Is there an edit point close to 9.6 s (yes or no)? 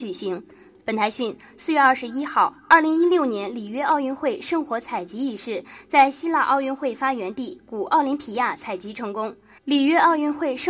yes